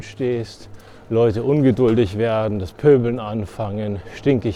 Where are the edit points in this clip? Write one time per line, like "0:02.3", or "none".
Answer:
none